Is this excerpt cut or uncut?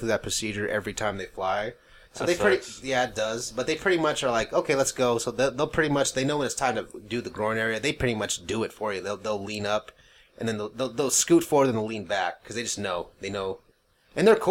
uncut